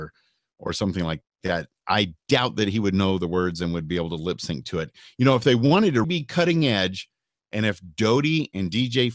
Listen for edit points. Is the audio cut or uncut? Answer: cut